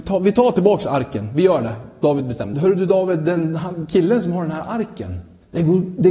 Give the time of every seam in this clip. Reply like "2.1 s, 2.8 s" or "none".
2.5 s